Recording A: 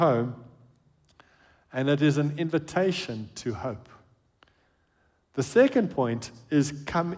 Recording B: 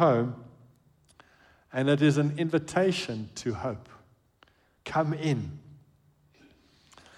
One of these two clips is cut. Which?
B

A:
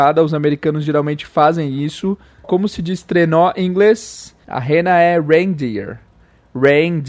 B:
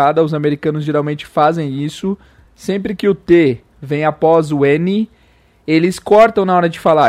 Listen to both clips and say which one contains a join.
A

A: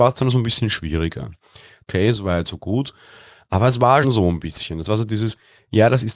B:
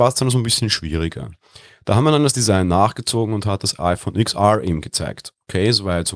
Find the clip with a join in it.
A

